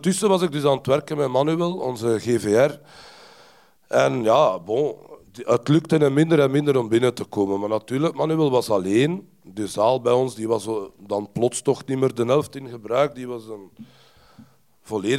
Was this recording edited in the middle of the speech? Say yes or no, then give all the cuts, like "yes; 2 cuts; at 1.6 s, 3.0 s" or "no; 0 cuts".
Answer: no; 0 cuts